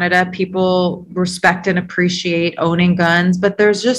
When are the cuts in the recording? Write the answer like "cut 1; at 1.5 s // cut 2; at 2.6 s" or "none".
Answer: none